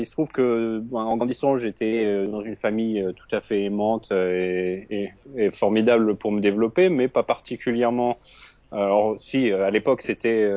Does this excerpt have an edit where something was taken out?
no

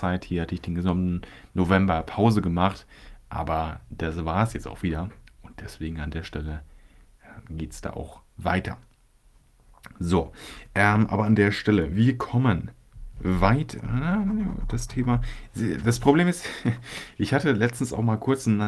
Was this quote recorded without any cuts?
yes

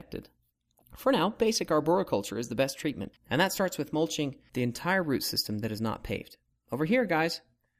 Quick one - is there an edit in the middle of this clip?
no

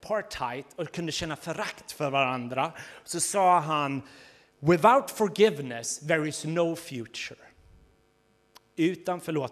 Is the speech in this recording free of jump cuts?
yes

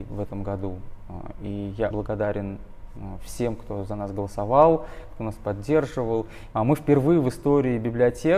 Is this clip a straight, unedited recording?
no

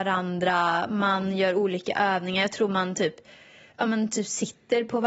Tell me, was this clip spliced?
no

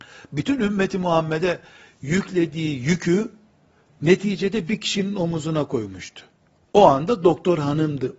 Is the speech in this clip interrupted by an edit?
no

